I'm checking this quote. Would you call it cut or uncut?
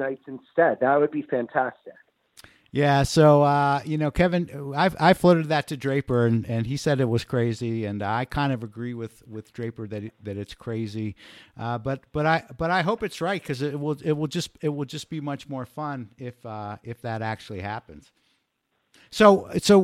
uncut